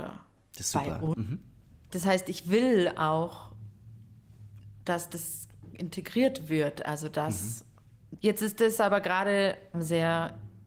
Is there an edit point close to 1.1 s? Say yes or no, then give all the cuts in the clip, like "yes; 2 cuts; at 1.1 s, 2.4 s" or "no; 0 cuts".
yes; 3 cuts; at 1.1 s, 8.2 s, 9.7 s